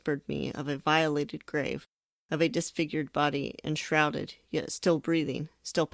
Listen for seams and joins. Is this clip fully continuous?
yes; 0 cuts

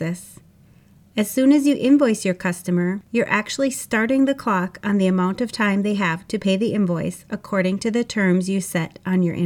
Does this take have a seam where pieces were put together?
no; 0 cuts

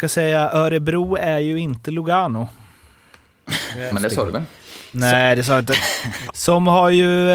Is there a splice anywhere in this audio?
yes; 2 cuts; at 3.9 s, 6.3 s

